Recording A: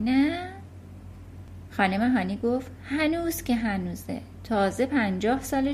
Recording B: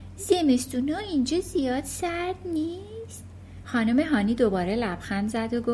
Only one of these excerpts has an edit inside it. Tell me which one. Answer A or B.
B